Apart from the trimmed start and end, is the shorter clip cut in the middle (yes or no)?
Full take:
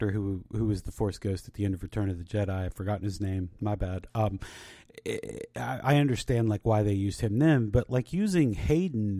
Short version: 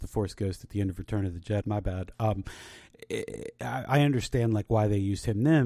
yes